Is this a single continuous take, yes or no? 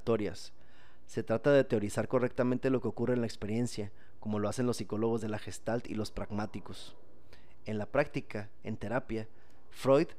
yes